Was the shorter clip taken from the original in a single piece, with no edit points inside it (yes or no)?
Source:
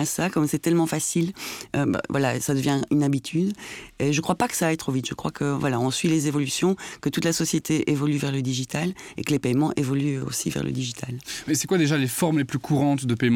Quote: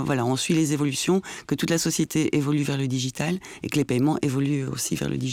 yes